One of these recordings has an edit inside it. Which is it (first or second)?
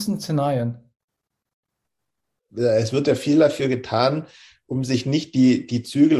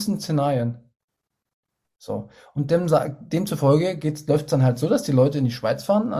second